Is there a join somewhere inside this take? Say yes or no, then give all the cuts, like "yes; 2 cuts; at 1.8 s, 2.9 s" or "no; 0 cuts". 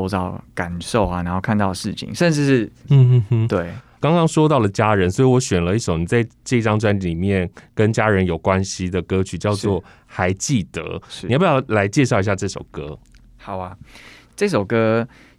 yes; 1 cut; at 2.8 s